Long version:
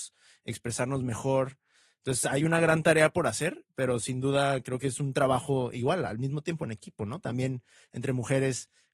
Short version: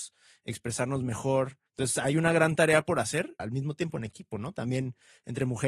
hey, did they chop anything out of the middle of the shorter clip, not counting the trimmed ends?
yes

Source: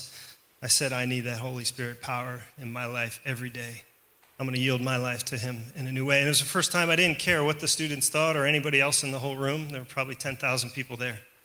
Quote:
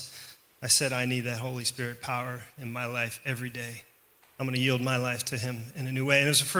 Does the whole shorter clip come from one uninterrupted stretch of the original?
yes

